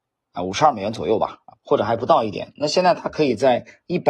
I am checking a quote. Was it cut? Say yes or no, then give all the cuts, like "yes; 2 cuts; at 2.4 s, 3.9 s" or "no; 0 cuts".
yes; 1 cut; at 1.5 s